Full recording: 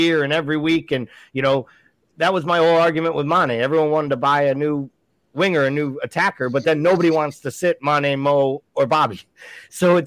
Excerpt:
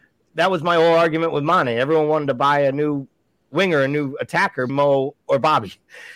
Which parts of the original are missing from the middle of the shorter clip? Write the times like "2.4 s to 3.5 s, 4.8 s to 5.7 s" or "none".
6.5 s to 8.2 s